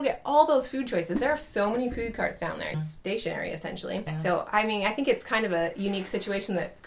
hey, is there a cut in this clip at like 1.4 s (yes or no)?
no